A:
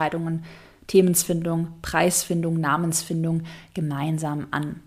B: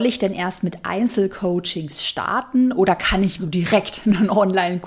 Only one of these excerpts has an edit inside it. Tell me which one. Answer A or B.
B